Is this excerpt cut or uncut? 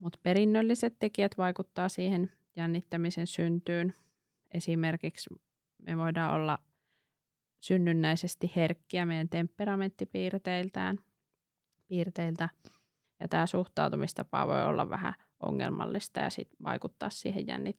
cut